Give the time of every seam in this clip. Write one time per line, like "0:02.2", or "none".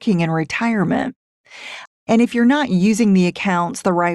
0:01.9